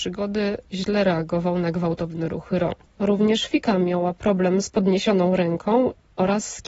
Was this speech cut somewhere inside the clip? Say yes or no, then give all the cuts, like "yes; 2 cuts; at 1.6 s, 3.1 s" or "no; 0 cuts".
no; 0 cuts